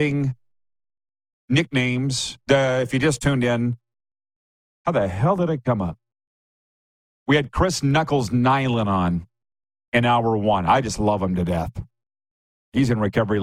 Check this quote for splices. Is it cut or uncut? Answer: uncut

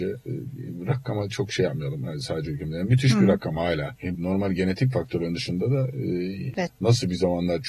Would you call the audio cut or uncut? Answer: cut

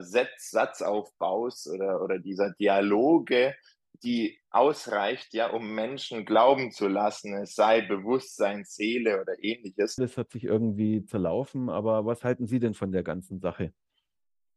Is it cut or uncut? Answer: cut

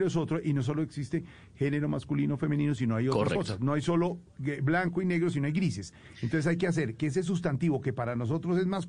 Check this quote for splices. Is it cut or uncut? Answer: uncut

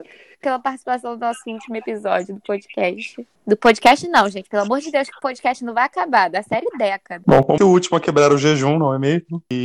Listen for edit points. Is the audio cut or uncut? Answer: cut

